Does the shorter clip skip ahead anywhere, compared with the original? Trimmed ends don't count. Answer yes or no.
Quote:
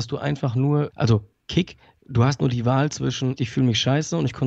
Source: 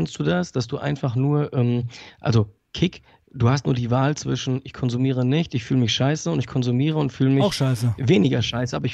yes